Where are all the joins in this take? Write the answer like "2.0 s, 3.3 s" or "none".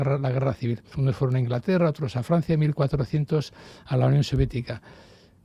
0.9 s